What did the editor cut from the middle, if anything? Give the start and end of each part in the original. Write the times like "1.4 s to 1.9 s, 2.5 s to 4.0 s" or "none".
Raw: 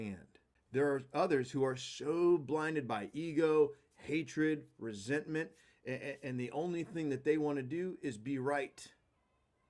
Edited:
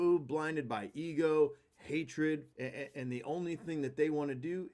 4.7 s to 5.8 s

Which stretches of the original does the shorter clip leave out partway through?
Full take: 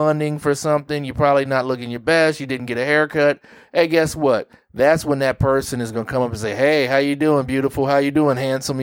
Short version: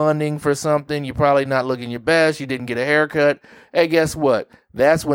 none

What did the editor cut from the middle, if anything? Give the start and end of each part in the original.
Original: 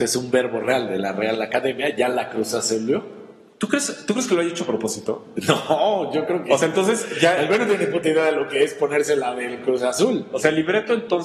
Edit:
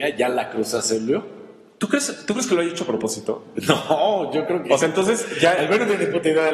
none

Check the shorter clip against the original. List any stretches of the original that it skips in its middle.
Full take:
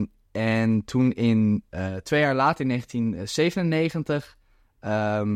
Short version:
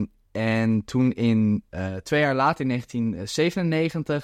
none

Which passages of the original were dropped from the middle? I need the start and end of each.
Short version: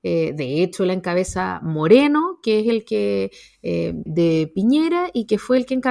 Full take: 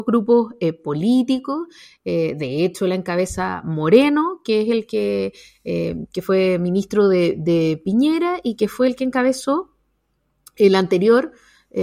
6.1 s to 7.4 s

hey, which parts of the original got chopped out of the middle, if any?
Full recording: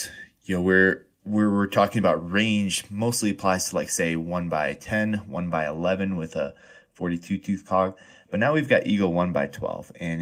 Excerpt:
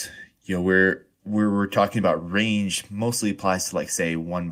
none

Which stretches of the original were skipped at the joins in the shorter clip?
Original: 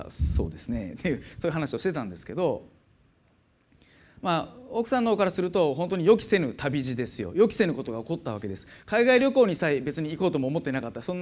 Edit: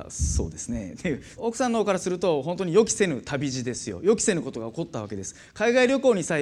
1.4 s to 4.7 s

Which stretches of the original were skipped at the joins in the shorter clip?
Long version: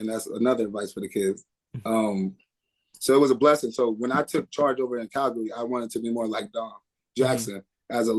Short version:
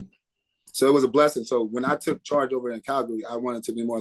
none

